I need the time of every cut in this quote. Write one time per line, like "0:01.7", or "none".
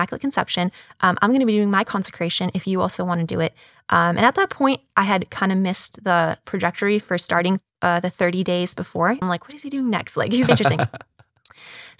0:09.2
0:10.5